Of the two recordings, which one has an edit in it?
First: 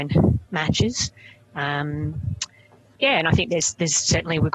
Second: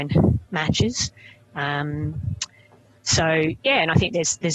first; 1 cut; at 3.0 s

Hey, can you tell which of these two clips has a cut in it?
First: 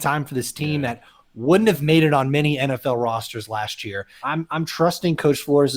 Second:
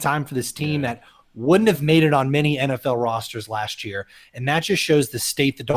first; 1 cut; at 4.2 s

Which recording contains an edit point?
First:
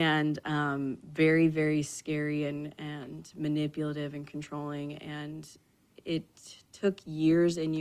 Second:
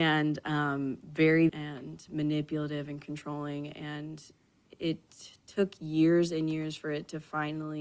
second; 1 cut; at 1.5 s

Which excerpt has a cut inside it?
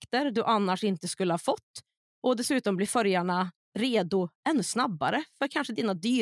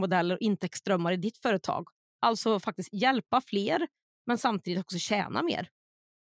second; 1 cut; at 2.1 s

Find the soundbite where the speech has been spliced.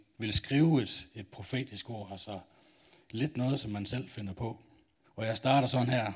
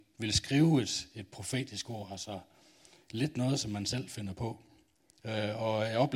first; 1 cut; at 5.0 s

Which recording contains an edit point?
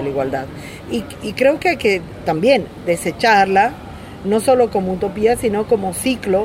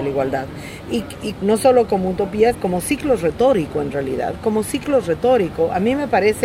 second; 2 cuts; at 1.4 s, 2.5 s

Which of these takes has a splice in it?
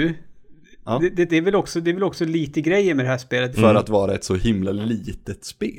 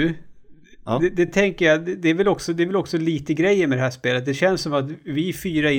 first; 2 cuts; at 1.3 s, 3.5 s

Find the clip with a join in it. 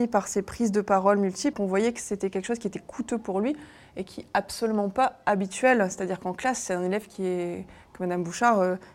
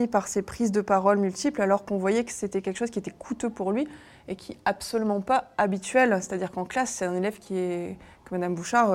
first; 1 cut; at 1.5 s

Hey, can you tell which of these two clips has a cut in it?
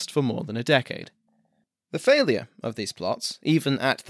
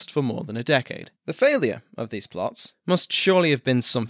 second; 2 cuts; at 1.2 s, 2.7 s

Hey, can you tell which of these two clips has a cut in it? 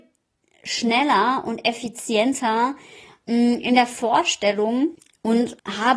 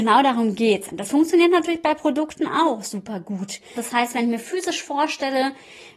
second; 2 cuts; at 0.9 s, 3.8 s

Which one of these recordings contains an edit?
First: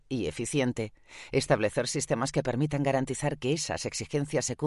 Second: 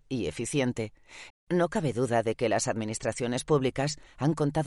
second; 1 cut; at 1.3 s

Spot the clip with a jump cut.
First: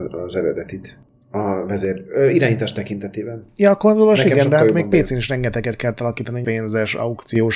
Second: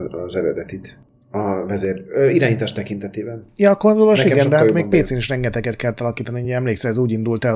first; 1 cut; at 6.4 s

